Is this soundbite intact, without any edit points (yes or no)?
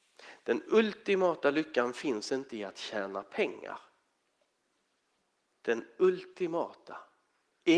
no